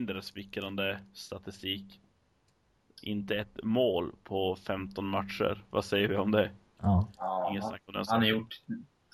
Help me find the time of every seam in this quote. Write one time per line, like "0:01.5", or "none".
0:06.8